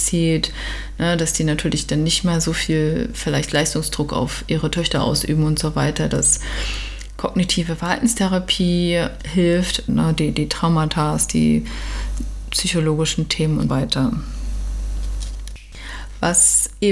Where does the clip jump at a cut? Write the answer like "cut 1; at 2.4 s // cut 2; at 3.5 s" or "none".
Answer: cut 1; at 9.9 s // cut 2; at 13.7 s